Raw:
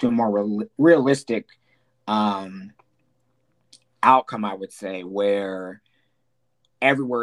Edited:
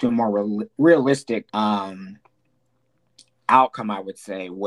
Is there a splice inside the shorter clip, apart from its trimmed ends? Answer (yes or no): yes